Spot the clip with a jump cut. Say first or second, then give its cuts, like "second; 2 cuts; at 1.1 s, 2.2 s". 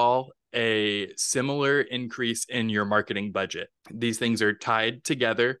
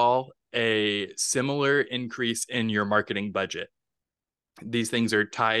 first; 1 cut; at 3.8 s